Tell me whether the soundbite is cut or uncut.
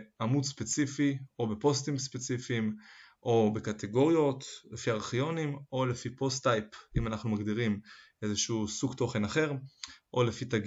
uncut